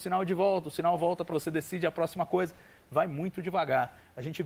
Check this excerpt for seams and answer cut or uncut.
cut